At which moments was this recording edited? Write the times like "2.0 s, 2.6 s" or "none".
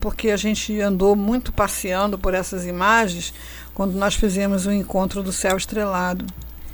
none